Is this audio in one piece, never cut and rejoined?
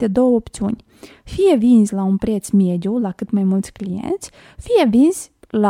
yes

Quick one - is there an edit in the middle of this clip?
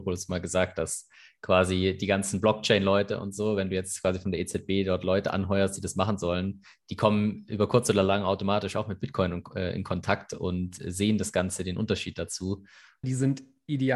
yes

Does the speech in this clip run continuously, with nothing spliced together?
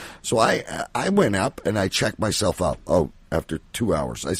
yes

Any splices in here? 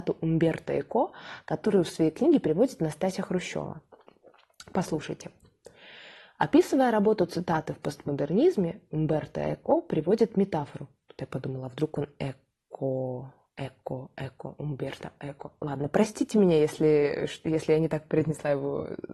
no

